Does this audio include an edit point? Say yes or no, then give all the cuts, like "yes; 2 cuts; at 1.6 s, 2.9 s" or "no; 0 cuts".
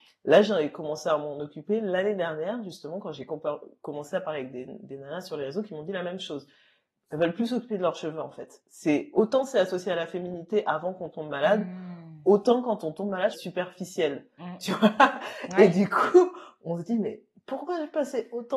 yes; 1 cut; at 13.3 s